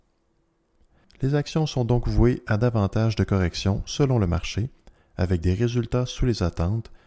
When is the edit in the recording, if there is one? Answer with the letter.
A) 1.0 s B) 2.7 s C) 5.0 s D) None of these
A